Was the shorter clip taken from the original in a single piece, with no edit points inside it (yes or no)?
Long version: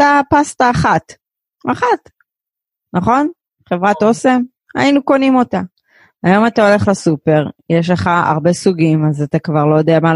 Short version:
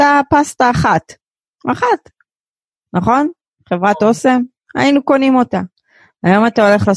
yes